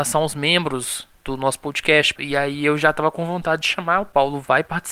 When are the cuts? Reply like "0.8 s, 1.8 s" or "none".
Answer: 2.2 s